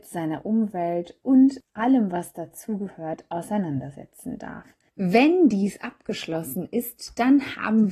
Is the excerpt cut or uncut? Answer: cut